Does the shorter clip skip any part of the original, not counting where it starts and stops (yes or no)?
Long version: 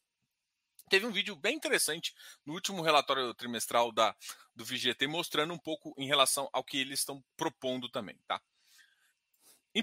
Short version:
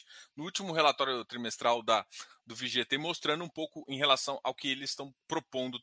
no